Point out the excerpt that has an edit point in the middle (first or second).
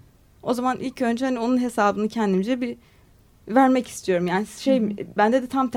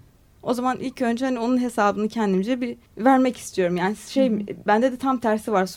second